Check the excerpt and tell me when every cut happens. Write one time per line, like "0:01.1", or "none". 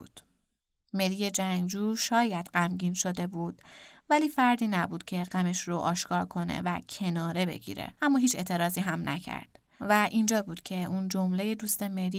none